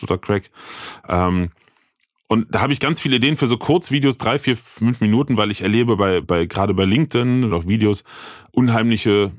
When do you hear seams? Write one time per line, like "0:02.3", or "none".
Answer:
0:06.2
0:07.5